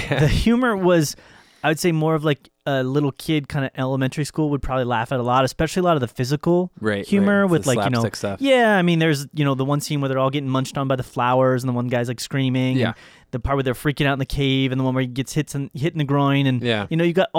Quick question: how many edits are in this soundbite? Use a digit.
0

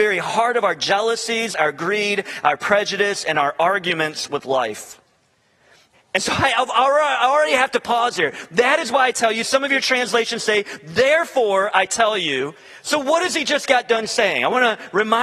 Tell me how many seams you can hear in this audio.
1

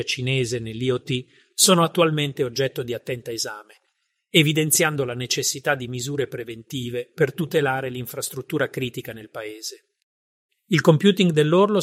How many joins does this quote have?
1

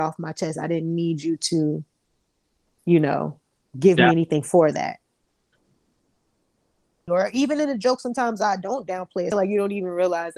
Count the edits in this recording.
2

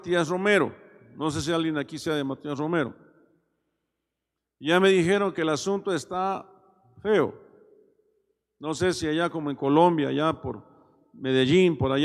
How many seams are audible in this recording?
0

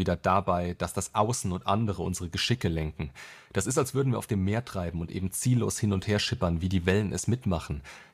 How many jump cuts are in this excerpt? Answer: 0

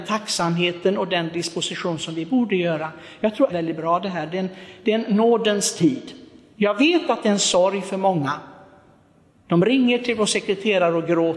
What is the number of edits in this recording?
1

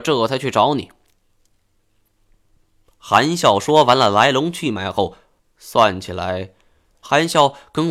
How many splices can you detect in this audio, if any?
2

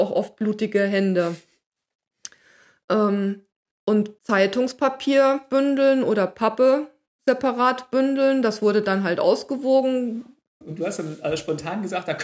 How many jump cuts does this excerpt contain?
2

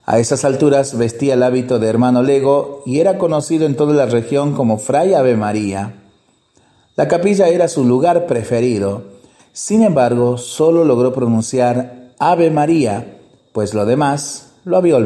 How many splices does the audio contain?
1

